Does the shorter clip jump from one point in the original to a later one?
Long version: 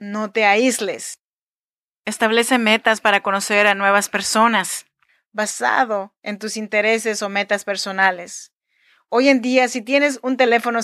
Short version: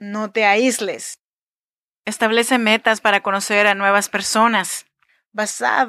no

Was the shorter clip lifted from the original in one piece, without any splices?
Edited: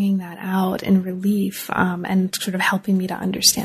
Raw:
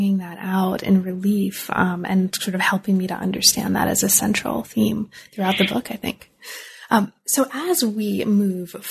yes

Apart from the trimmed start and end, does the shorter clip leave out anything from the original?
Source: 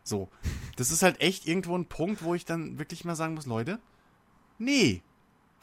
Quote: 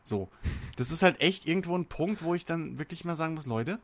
no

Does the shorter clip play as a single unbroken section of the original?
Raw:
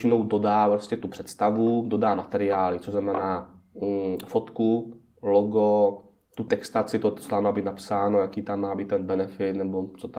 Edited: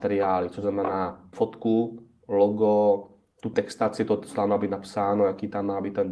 no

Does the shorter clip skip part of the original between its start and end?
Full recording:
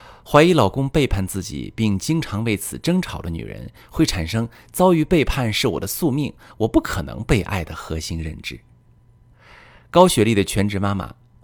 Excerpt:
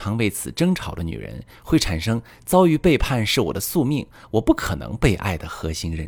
no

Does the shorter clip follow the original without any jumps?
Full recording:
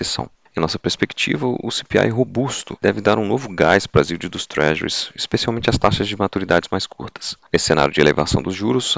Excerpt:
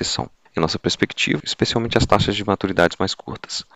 no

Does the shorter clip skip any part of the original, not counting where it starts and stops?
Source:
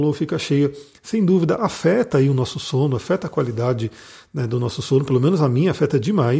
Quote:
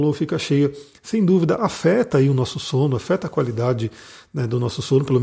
no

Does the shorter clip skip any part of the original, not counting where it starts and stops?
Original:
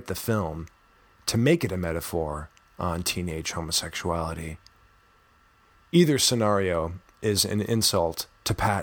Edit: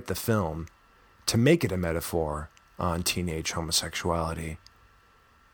no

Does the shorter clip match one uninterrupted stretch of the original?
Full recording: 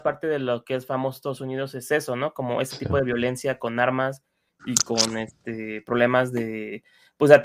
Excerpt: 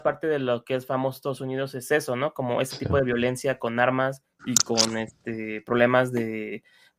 no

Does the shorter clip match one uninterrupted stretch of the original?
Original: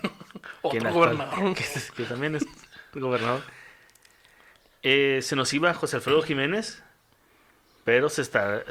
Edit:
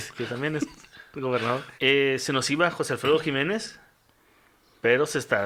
no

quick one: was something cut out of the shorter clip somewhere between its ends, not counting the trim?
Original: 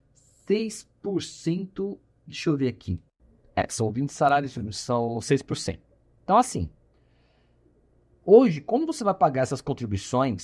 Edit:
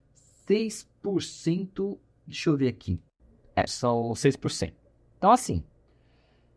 yes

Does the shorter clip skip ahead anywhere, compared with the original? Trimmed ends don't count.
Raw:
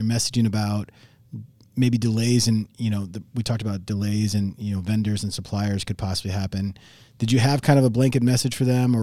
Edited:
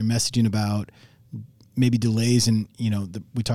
no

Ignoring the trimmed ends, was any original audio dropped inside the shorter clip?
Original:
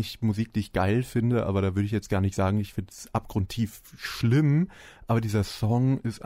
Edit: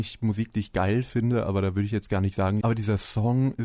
yes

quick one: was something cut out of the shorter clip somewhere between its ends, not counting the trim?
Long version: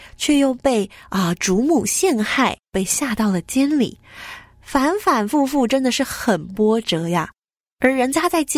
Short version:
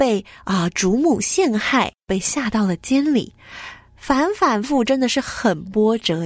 yes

